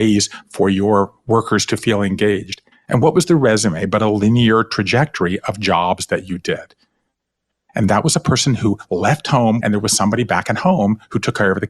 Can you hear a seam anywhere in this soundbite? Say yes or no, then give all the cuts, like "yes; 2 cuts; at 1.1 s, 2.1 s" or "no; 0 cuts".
yes; 3 cuts; at 2.7 s, 7.7 s, 9.6 s